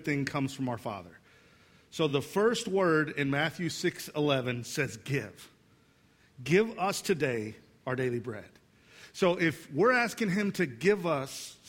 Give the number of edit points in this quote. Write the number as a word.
zero